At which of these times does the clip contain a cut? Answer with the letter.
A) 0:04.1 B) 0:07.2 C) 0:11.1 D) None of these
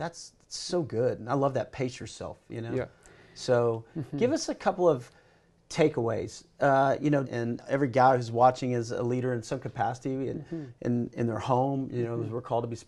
B